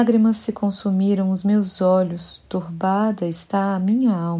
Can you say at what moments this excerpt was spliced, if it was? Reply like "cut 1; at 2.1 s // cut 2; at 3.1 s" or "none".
none